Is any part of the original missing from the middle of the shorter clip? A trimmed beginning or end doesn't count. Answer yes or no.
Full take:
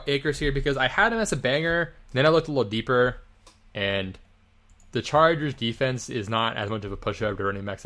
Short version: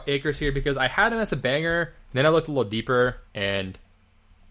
yes